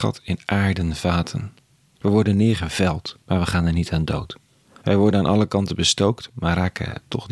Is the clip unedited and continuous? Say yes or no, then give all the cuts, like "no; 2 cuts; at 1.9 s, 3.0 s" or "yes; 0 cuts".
no; 3 cuts; at 1.9 s, 3.2 s, 4.8 s